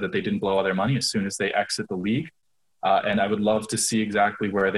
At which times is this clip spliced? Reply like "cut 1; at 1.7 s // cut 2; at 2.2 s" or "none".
none